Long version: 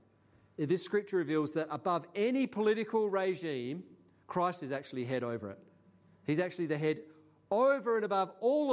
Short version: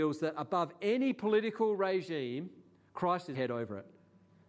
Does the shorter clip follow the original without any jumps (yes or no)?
no